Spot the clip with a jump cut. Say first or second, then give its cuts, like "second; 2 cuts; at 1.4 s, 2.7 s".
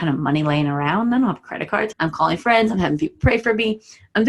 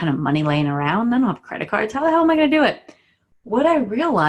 first; 1 cut; at 1.9 s